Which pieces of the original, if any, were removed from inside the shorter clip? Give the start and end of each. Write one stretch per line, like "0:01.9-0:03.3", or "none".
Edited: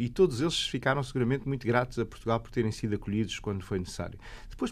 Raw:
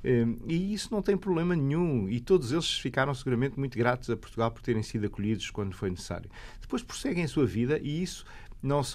none